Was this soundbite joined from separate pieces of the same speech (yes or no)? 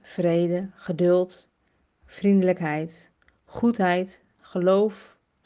no